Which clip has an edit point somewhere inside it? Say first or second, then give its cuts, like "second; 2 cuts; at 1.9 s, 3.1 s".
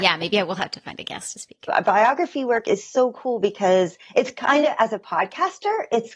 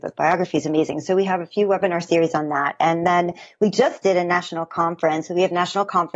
first; 1 cut; at 1.7 s